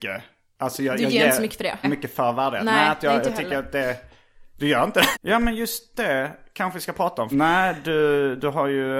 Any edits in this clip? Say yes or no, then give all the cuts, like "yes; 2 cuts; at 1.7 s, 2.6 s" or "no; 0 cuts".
yes; 3 cuts; at 1.8 s, 5.1 s, 7.3 s